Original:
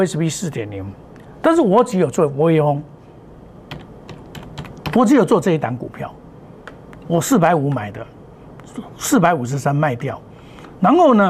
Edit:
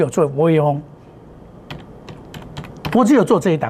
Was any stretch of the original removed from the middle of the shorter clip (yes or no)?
no